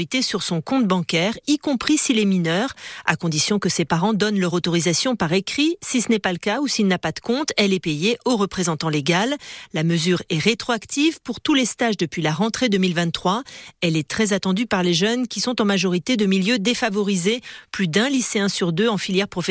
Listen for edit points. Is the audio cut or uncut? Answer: uncut